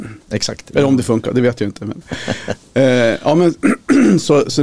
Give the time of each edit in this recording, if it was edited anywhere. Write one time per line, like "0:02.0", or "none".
0:02.0